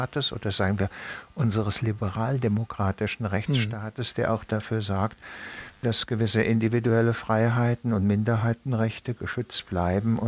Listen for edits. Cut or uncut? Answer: uncut